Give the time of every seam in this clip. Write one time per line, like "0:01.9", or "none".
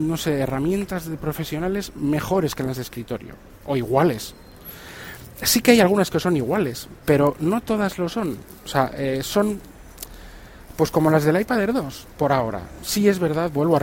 none

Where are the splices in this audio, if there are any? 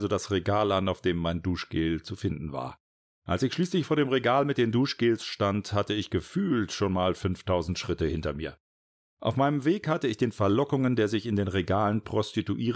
0:03.1
0:09.0

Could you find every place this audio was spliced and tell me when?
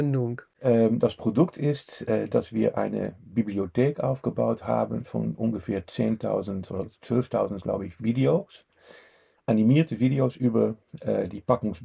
none

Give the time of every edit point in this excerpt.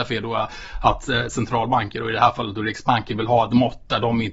none

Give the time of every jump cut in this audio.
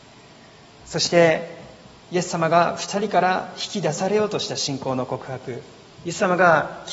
none

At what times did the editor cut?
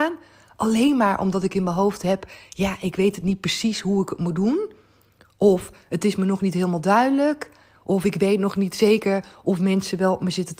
none

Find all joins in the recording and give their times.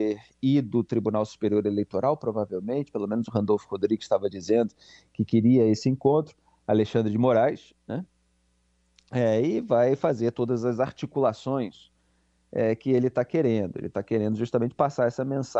none

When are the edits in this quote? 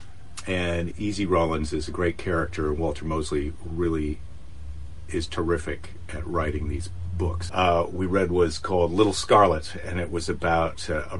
0:00.9
0:07.5

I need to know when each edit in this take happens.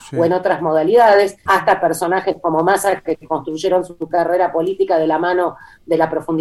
0:01.5

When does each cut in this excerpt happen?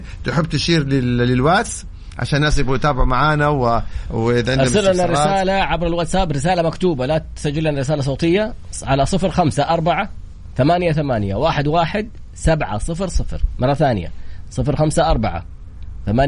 none

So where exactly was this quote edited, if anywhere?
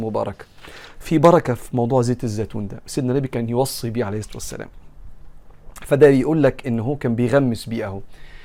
none

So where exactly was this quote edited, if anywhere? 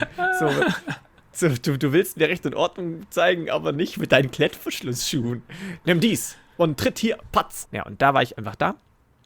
0:07.6

